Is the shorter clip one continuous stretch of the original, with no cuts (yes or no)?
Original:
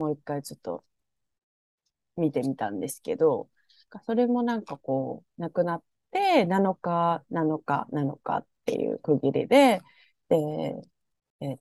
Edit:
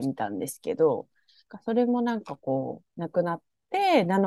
yes